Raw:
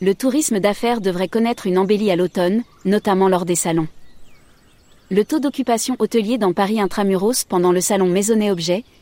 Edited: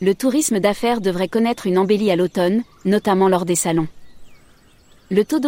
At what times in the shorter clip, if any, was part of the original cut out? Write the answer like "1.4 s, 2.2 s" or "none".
none